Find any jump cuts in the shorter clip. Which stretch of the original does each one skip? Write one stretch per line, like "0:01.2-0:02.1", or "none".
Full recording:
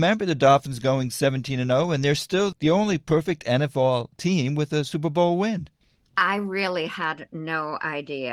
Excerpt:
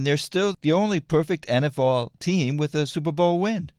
none